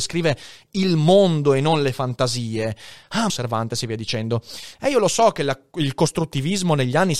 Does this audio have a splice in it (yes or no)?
yes